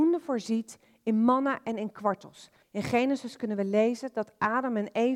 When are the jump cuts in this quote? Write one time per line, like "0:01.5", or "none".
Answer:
0:02.6